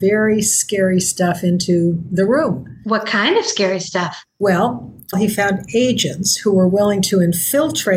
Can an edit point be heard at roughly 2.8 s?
no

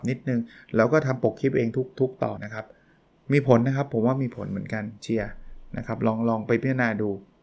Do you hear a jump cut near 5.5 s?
no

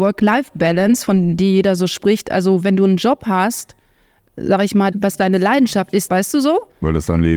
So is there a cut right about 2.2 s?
no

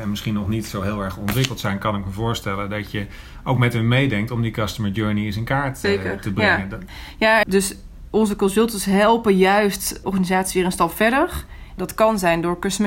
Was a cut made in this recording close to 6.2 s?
no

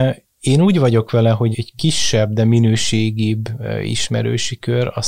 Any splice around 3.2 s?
no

